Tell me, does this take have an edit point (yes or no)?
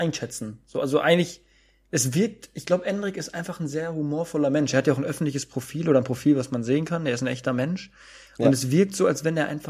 no